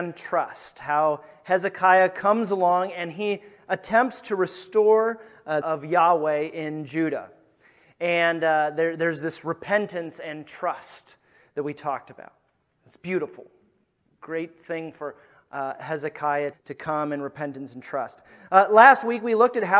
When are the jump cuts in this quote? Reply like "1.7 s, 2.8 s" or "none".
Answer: 5.6 s, 16.5 s